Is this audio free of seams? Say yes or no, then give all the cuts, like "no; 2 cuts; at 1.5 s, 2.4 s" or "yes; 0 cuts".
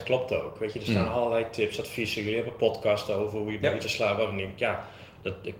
yes; 0 cuts